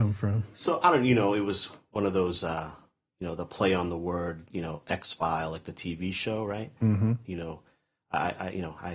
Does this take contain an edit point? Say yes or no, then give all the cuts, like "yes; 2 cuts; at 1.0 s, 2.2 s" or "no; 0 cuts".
yes; 1 cut; at 7.2 s